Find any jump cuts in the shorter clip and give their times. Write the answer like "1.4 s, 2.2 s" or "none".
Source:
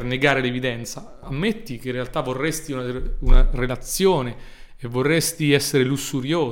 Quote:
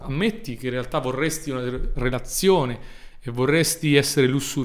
1.9 s